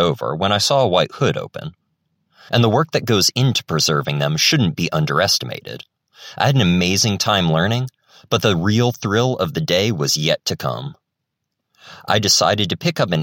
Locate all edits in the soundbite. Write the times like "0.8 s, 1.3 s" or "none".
2.5 s